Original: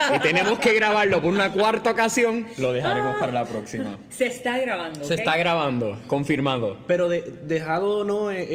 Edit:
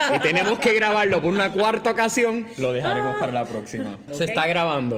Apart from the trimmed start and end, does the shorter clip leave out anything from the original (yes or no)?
yes